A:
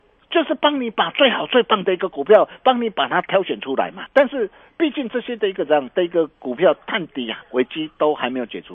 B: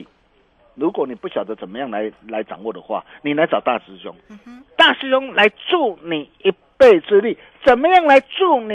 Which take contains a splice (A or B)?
A